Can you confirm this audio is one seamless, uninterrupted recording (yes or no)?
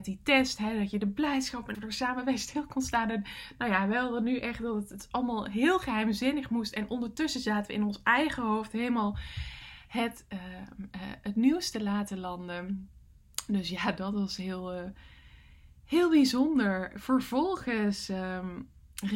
no